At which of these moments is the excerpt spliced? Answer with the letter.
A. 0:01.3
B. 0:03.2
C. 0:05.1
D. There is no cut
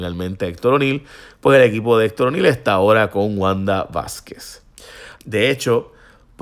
C